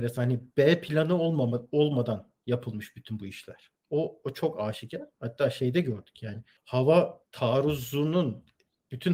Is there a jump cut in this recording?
no; 0 cuts

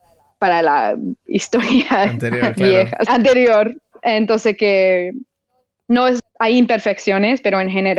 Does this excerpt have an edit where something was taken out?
yes; 2 cuts; at 3.1 s, 6.2 s

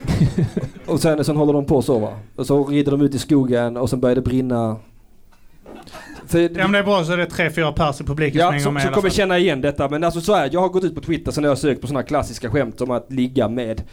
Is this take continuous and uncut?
no; 1 cut; at 6.2 s

